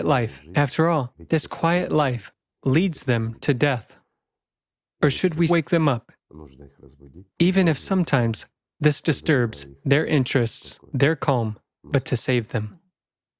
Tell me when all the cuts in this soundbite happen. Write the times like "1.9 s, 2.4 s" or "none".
5.5 s, 7.3 s